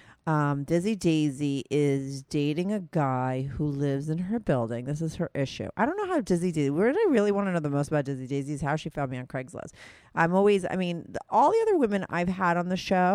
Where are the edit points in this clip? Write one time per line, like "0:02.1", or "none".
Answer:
none